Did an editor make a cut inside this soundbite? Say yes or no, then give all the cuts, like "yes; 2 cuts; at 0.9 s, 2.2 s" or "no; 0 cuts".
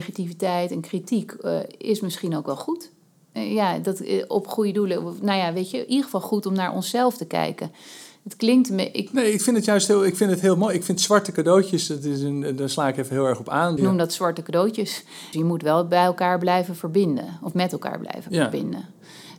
yes; 2 cuts; at 13.8 s, 15.3 s